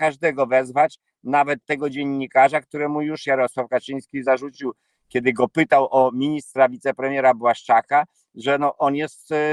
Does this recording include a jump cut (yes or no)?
no